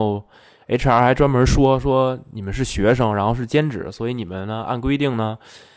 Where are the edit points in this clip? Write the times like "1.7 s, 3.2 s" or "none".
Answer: none